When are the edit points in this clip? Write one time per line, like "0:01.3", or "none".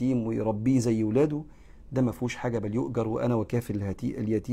none